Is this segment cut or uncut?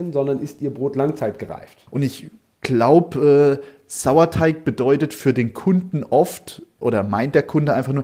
cut